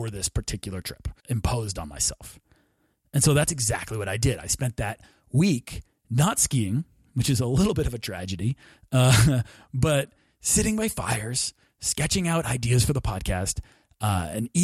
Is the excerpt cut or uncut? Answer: cut